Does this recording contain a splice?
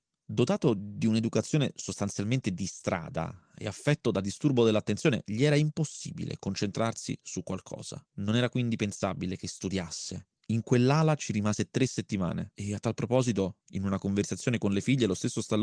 yes; 1 cut; at 10.4 s

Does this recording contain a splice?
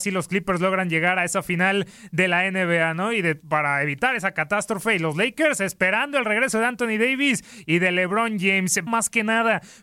yes; 1 cut; at 8.9 s

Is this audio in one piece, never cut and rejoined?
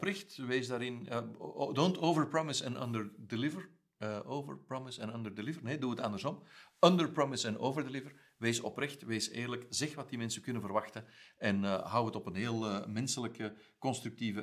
yes; 0 cuts

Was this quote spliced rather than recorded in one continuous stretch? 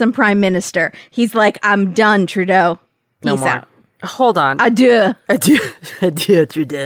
no; 0 cuts

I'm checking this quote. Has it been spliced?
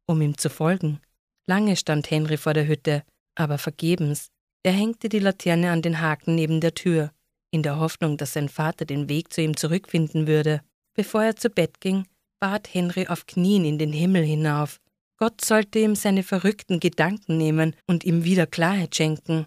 yes; 2 cuts; at 4.5 s, 17.8 s

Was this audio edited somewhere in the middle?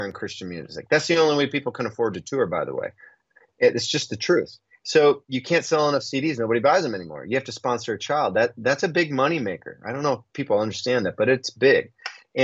no; 0 cuts

